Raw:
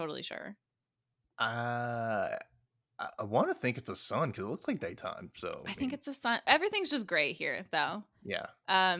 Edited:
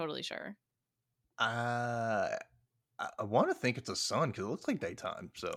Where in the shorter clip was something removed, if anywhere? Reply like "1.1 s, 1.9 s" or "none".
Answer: none